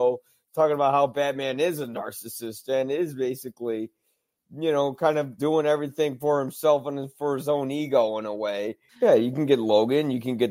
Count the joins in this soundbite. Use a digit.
2